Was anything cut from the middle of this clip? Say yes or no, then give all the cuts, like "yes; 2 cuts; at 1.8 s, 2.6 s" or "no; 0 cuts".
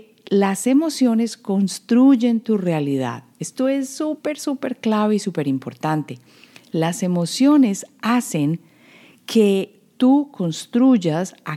no; 0 cuts